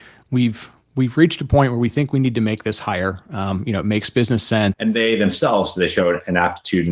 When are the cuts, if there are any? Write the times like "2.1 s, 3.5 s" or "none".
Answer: 4.7 s